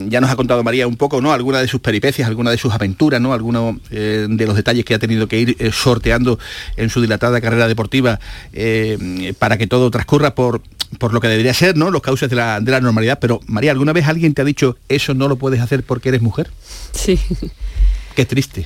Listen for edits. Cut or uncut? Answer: uncut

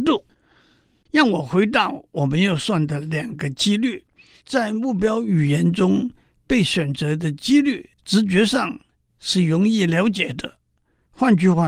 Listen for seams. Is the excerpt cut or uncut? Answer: cut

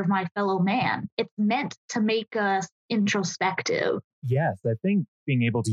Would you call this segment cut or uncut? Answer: cut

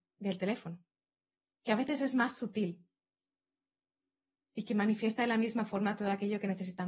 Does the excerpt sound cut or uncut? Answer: uncut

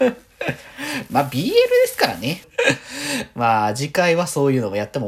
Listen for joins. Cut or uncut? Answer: cut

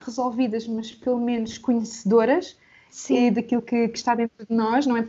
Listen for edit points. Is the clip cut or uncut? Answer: uncut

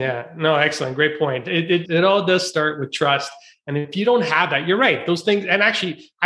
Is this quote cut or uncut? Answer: cut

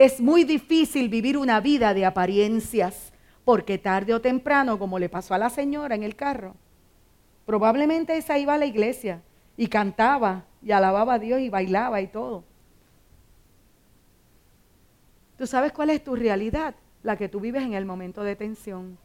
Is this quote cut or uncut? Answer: uncut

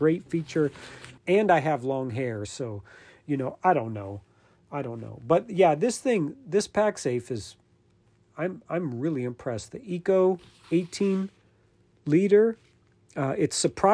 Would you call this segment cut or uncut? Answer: cut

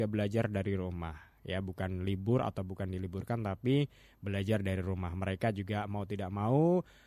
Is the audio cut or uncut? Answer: uncut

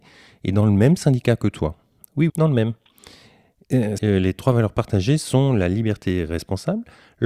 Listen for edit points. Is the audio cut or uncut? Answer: cut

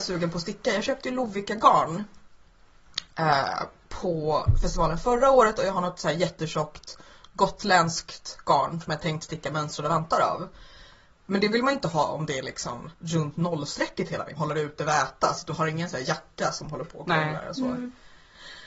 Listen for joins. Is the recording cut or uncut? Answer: cut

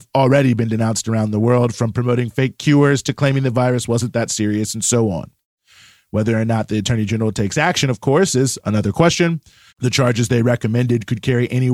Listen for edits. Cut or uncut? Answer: cut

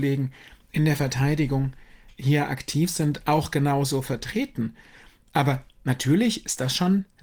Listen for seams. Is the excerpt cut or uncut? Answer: uncut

